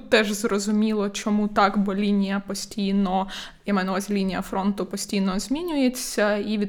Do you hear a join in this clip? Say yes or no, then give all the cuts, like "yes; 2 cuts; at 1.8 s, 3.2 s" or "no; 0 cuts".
no; 0 cuts